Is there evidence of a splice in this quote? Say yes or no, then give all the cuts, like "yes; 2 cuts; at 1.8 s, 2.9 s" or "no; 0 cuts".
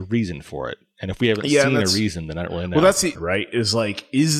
yes; 1 cut; at 3.1 s